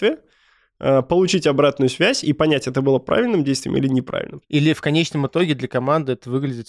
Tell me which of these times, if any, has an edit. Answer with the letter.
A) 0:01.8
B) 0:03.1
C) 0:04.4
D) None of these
C